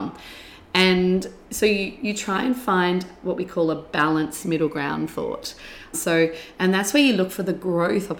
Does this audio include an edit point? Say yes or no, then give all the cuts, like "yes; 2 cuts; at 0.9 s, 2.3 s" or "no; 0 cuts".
yes; 2 cuts; at 2.0 s, 5.9 s